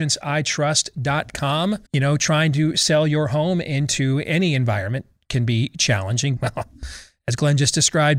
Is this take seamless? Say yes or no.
no